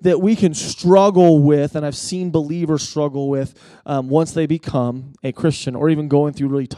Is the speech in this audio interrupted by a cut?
no; 0 cuts

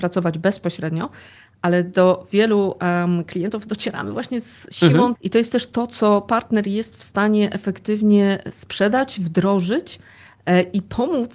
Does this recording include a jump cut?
yes; 1 cut; at 5.1 s

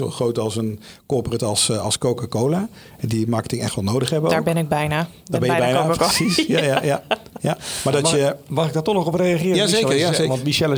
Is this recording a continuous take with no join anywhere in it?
yes; 0 cuts

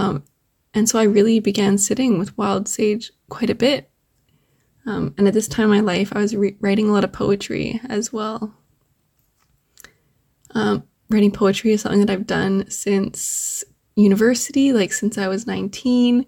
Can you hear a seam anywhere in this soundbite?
no; 0 cuts

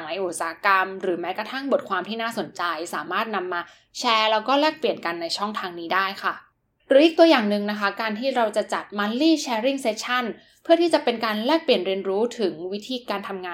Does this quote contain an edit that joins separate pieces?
no; 0 cuts

